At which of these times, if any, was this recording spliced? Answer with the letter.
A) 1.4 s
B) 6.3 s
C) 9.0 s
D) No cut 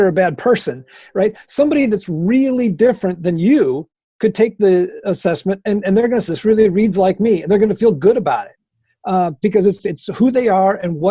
B